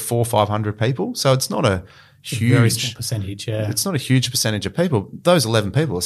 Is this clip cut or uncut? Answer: uncut